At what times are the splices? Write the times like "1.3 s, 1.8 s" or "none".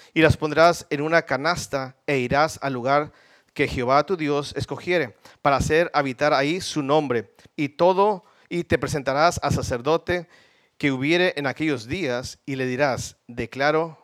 7.5 s